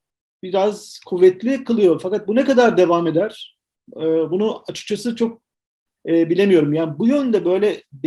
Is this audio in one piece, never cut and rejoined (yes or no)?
yes